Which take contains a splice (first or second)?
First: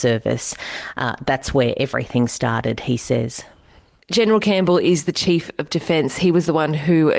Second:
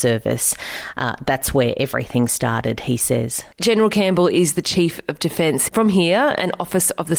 second